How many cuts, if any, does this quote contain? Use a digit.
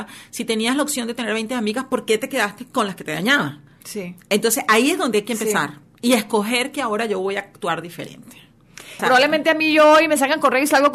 1